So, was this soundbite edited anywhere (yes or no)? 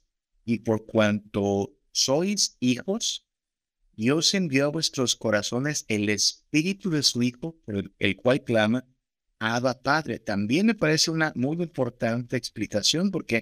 no